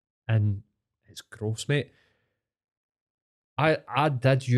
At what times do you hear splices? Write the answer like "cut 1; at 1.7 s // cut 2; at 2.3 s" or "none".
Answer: none